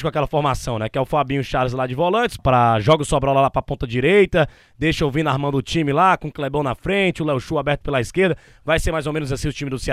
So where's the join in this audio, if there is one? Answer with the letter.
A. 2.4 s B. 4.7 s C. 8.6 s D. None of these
A